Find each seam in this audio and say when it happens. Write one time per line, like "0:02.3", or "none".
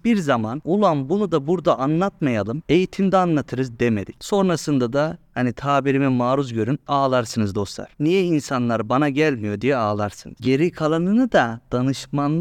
0:04.2
0:10.4